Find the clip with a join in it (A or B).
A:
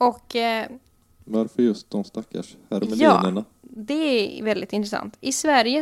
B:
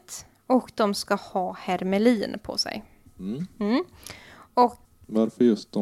B